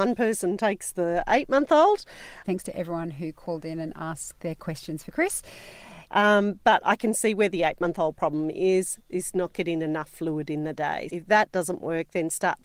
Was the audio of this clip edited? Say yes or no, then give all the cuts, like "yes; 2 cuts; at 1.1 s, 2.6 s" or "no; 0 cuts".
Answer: yes; 3 cuts; at 2.4 s, 6.1 s, 11.1 s